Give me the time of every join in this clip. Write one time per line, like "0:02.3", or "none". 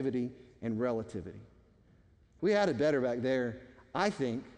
0:02.4